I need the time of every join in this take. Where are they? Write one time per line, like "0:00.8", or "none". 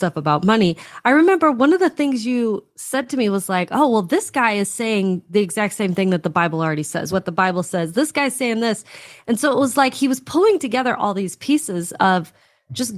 0:07.1